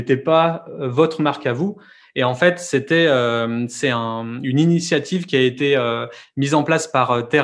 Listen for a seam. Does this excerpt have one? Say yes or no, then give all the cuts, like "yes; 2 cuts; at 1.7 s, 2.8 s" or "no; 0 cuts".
no; 0 cuts